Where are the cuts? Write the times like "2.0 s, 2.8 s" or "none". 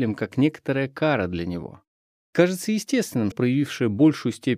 2.2 s, 3.3 s